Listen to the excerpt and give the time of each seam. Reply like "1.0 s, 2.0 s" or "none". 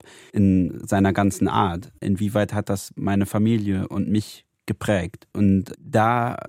2.0 s, 5.3 s